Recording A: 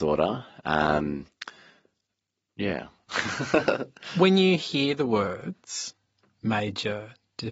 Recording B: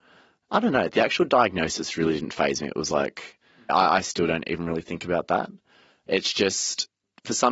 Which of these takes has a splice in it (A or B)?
B